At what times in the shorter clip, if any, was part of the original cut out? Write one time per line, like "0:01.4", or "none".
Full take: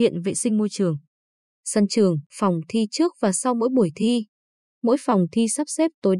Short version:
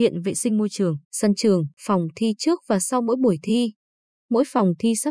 0:01.0